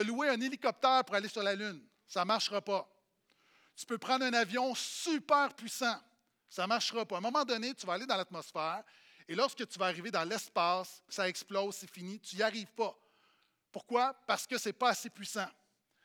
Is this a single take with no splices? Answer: no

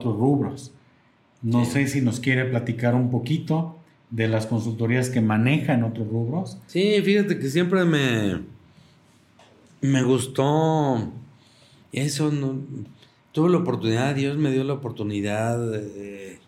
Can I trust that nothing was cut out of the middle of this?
yes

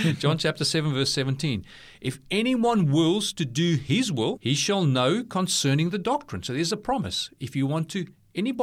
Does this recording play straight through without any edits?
no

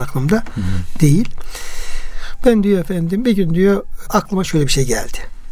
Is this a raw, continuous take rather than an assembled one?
yes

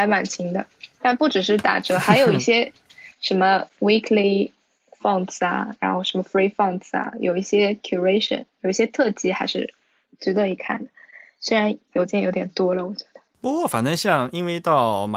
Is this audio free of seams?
yes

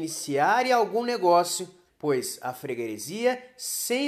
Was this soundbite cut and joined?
yes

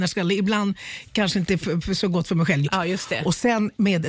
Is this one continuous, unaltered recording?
no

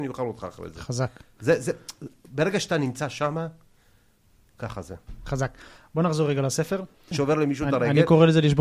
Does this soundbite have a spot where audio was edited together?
yes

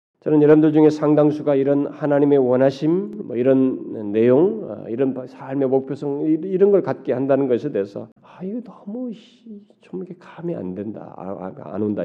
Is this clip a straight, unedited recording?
no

